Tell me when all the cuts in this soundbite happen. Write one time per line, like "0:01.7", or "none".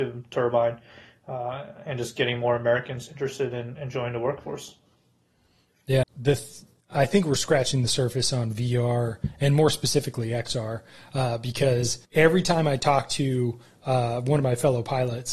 0:06.0
0:12.0